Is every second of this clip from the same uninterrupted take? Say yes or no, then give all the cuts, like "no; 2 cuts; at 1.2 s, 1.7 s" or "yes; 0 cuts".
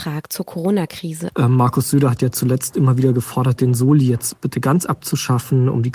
no; 1 cut; at 1.3 s